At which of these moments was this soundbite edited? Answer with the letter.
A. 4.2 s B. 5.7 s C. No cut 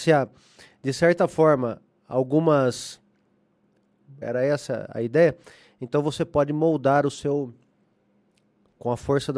A